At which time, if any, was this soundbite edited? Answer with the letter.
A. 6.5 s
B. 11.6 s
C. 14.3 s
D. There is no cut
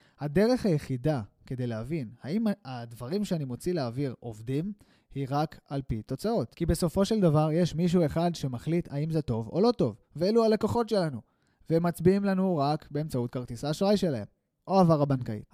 D